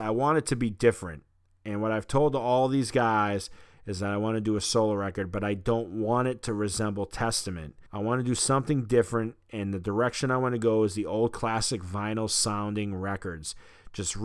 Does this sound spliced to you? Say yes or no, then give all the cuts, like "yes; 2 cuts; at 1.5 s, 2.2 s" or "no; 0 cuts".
yes; 1 cut; at 7.9 s